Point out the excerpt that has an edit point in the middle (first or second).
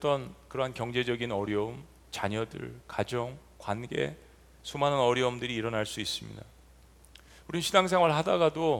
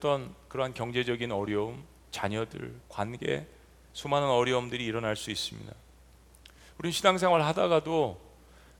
second